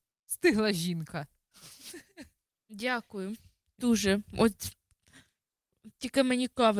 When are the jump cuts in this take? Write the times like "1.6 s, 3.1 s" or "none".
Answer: none